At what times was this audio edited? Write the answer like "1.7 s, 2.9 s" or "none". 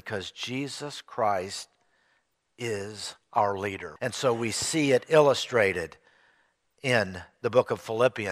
4.0 s